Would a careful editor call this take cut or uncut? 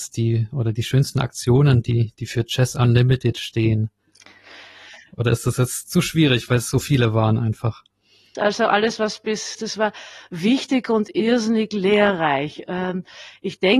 cut